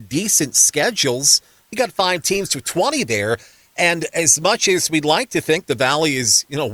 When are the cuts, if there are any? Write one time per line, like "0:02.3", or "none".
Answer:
0:01.7